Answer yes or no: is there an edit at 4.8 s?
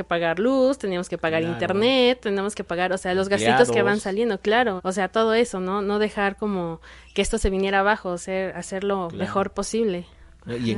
yes